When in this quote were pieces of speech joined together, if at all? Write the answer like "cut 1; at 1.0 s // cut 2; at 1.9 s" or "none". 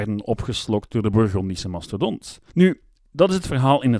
cut 1; at 2.5 s